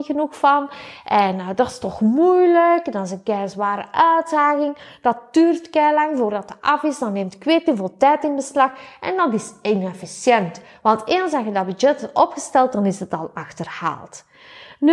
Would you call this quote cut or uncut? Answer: uncut